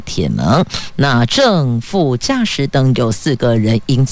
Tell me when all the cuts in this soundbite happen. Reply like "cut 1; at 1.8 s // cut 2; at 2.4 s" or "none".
none